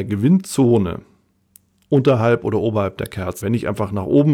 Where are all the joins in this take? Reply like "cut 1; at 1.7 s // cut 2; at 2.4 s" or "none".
cut 1; at 3.4 s